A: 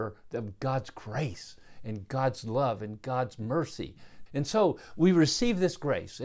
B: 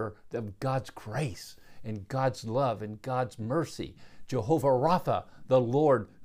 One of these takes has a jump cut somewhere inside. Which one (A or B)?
A